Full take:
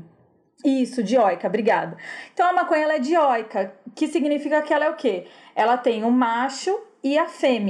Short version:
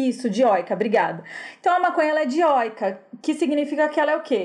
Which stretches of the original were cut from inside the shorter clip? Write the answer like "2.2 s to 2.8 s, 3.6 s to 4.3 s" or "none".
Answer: none